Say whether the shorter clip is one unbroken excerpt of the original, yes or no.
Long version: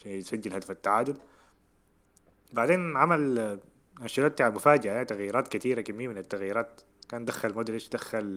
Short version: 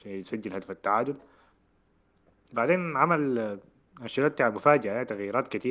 yes